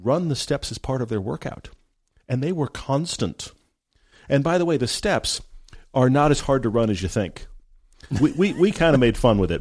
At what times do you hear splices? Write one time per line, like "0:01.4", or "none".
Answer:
none